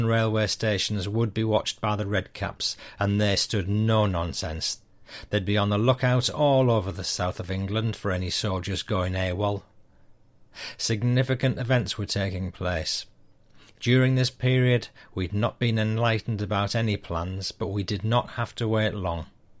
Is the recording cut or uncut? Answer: uncut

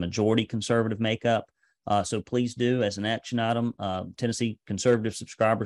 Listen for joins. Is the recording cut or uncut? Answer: uncut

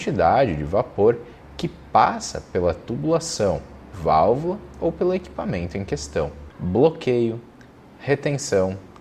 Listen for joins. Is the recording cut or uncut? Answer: cut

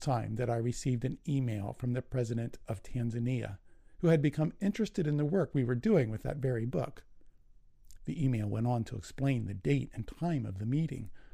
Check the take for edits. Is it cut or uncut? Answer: cut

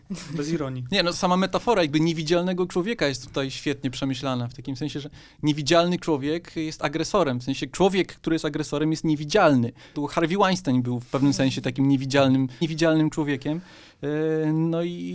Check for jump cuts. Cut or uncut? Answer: cut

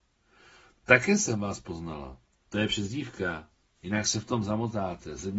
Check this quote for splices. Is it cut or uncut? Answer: cut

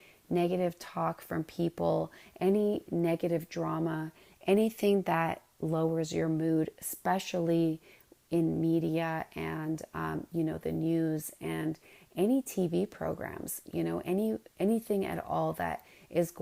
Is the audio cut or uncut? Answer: uncut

